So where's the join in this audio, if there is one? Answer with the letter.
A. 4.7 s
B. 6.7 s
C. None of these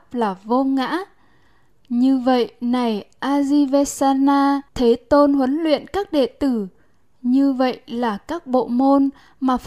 A